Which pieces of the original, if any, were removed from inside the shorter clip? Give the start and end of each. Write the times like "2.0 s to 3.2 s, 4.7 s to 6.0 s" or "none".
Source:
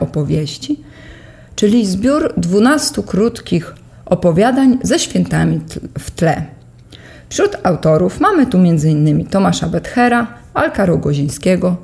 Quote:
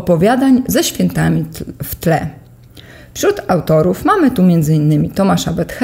none